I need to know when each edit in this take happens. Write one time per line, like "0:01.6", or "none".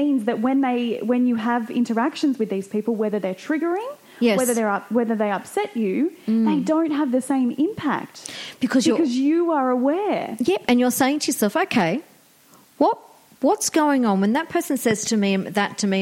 none